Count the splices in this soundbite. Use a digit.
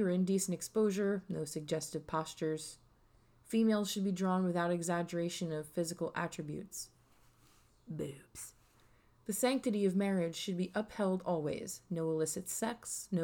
0